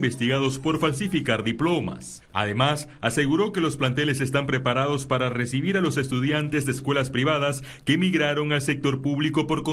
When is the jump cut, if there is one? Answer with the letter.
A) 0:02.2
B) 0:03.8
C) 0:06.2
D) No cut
A